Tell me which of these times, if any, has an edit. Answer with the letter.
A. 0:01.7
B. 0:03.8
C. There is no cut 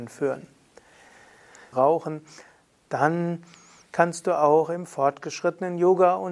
A